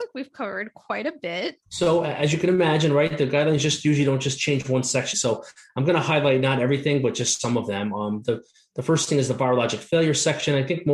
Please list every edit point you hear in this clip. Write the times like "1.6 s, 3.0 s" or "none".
1.6 s, 5.1 s